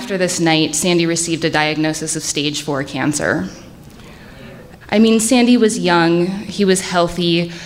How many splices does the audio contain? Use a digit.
1